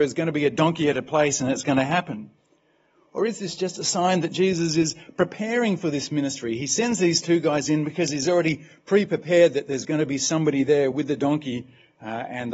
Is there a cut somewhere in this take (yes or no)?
no